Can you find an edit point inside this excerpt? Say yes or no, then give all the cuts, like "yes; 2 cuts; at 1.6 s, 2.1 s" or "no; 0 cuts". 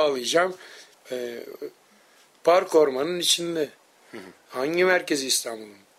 yes; 1 cut; at 0.9 s